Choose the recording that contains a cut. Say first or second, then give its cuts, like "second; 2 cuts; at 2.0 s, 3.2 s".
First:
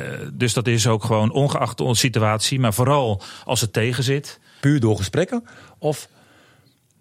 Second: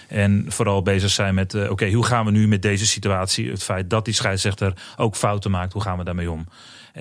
first; 1 cut; at 4.6 s